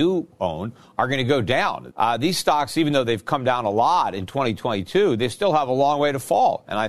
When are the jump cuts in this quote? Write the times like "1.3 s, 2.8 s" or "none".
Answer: 1.9 s